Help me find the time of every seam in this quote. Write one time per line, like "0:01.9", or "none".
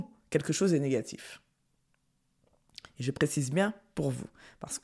none